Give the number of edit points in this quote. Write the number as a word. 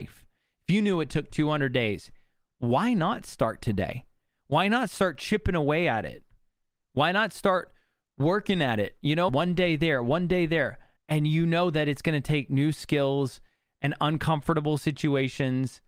two